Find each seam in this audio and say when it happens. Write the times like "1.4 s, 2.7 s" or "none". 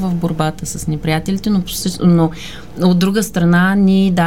none